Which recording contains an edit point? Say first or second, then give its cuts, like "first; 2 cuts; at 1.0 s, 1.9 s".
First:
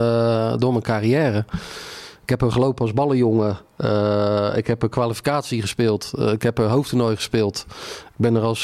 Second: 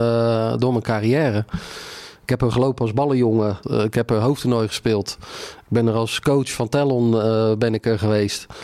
second; 1 cut; at 3.6 s